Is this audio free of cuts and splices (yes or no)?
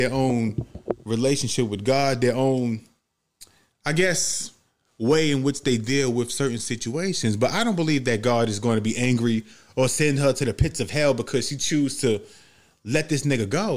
yes